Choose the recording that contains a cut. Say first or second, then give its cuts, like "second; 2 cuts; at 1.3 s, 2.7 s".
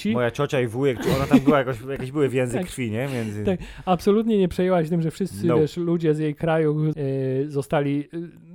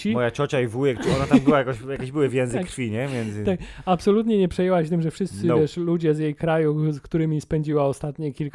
first; 1 cut; at 6.9 s